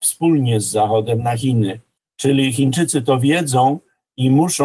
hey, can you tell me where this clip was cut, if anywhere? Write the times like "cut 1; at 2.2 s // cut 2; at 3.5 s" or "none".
cut 1; at 2.0 s